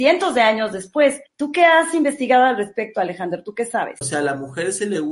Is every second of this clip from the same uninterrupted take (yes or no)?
no